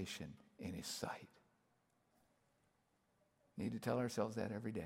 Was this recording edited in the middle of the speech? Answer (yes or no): no